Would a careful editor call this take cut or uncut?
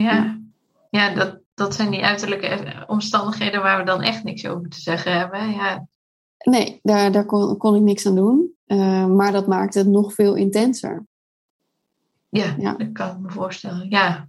uncut